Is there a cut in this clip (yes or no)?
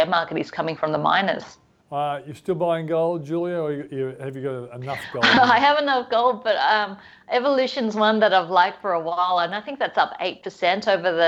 yes